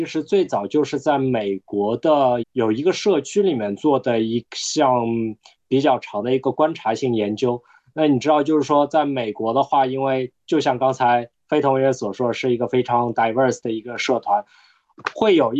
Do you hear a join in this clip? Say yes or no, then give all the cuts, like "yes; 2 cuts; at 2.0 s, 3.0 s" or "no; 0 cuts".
yes; 1 cut; at 2.4 s